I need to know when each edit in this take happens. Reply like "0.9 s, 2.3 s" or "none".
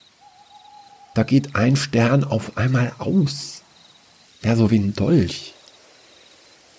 4.3 s